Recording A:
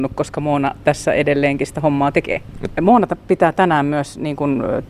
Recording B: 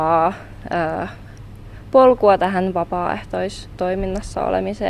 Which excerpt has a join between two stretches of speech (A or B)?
A